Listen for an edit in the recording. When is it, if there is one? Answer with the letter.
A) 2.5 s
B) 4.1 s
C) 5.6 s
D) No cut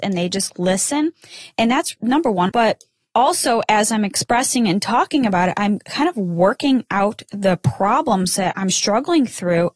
A